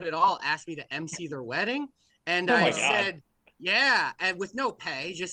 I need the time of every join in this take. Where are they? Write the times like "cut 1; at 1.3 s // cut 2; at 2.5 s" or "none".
none